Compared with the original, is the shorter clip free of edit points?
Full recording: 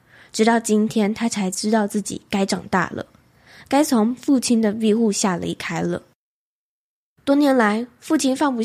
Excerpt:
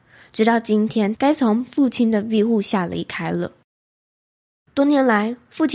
no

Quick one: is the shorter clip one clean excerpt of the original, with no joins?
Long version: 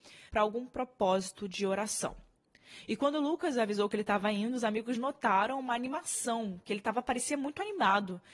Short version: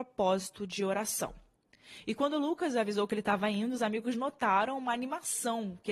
yes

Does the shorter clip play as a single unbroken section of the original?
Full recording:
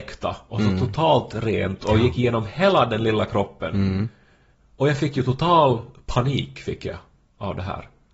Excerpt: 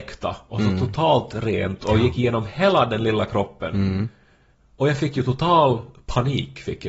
yes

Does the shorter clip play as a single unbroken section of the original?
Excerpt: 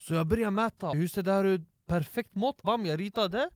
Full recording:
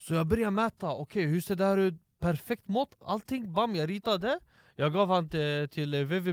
no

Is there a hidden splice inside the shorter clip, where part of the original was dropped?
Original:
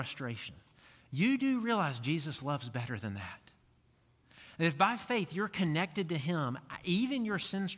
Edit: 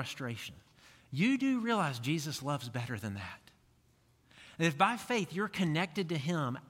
no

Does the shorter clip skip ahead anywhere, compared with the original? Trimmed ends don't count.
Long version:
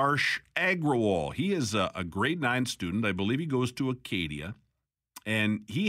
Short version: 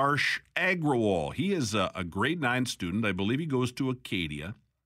no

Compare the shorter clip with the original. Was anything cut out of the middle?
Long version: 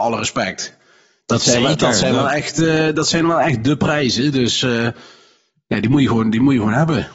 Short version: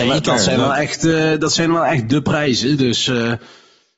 no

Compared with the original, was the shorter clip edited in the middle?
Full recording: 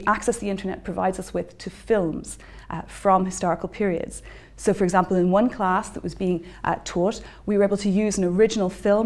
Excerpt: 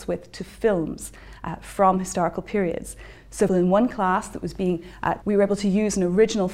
yes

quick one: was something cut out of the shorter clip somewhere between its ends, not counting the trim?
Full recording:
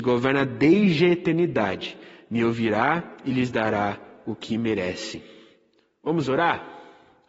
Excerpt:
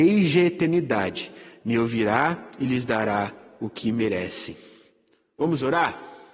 no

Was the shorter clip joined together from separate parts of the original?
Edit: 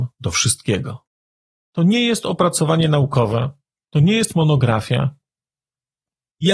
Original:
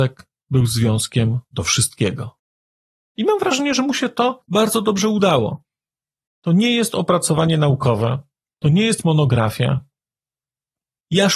yes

